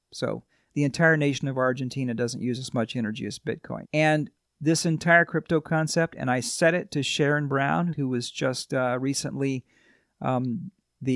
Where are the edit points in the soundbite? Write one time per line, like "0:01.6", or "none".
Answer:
0:03.8
0:07.9